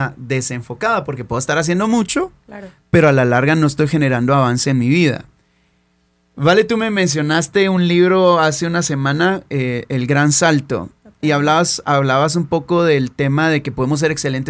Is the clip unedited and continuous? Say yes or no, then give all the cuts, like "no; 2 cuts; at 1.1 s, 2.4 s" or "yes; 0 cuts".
yes; 0 cuts